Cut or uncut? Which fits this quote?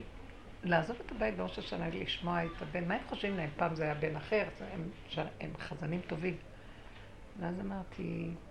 uncut